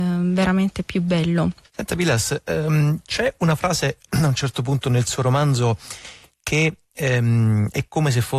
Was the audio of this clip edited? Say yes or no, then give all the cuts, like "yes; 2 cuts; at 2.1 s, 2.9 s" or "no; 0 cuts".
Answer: no; 0 cuts